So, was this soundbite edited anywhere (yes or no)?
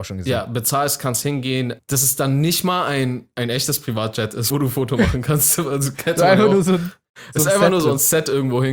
yes